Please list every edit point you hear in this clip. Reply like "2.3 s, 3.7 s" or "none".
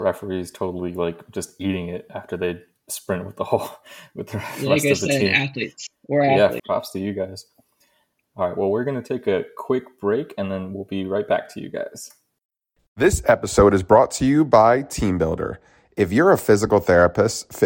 6.6 s, 12.8 s